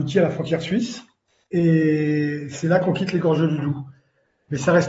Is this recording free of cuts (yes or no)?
yes